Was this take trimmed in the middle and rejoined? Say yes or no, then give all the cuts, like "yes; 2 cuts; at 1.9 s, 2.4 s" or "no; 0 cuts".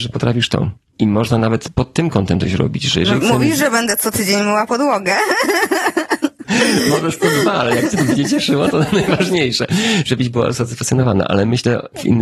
no; 0 cuts